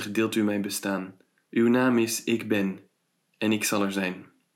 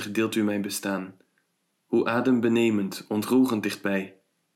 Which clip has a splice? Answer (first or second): first